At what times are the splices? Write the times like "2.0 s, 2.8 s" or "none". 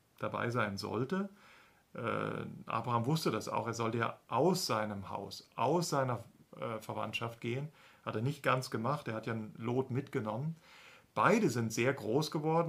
none

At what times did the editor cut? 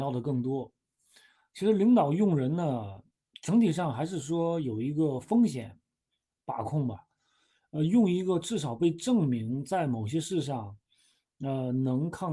none

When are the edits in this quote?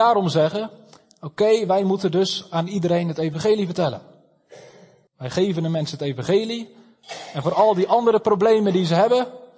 5.1 s

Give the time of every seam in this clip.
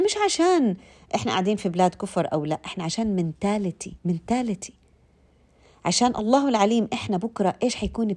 4.0 s

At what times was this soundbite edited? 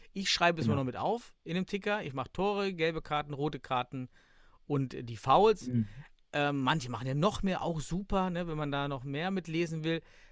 none

